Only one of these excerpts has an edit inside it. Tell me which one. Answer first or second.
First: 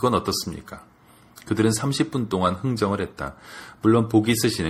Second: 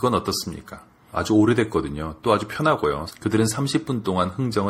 second